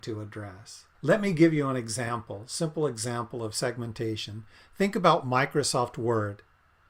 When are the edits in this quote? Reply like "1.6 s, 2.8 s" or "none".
0.9 s